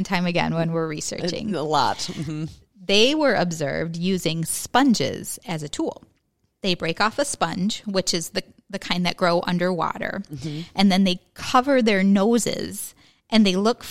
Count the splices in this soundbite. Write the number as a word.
zero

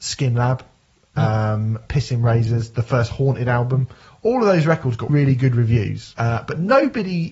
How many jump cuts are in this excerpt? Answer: two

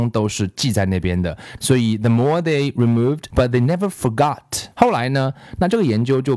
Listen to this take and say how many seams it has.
three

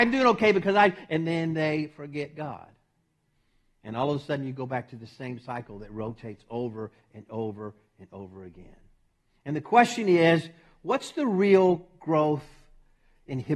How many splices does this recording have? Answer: zero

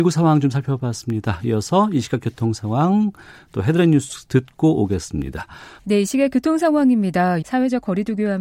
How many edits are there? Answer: two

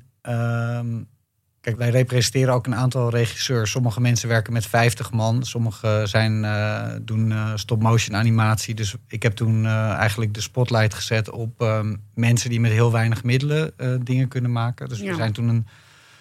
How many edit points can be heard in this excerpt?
one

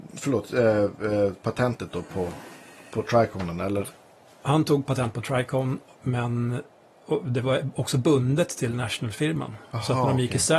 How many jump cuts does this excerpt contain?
zero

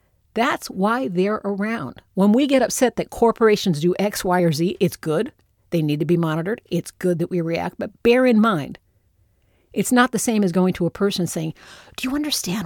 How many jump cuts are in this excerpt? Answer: zero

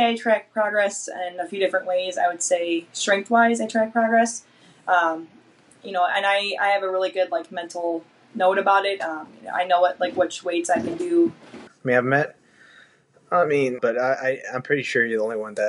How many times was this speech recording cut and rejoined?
two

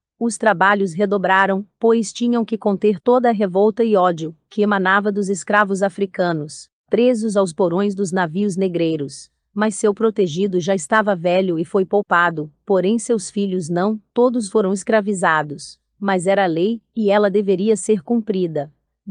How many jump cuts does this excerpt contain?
zero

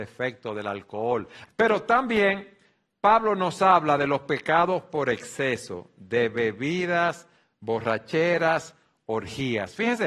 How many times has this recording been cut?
one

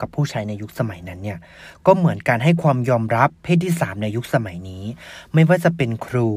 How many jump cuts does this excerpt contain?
zero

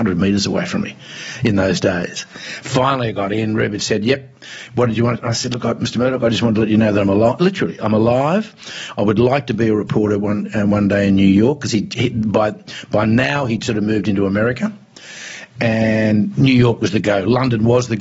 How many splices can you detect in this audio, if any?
zero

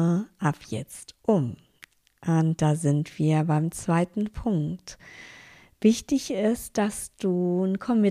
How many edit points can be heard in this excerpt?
zero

